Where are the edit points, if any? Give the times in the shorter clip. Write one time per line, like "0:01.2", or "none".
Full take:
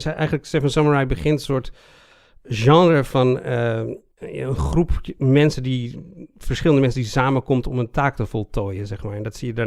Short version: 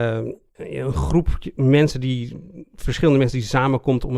none